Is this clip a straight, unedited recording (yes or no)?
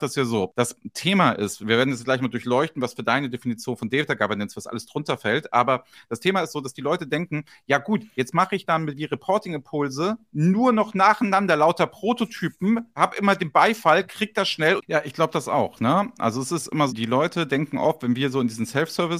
no